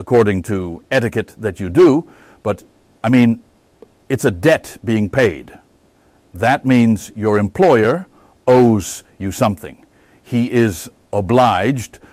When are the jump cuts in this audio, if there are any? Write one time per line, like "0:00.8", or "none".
none